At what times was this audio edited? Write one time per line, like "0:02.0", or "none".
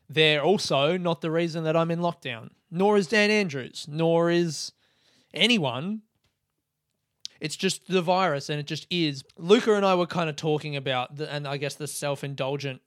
0:07.3
0:09.2